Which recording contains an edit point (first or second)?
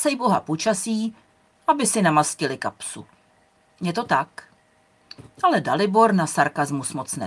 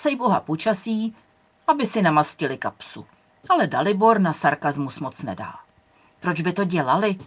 second